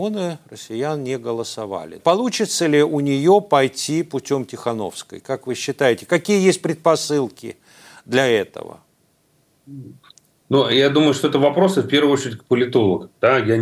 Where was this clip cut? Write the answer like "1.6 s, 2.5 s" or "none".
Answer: 2.0 s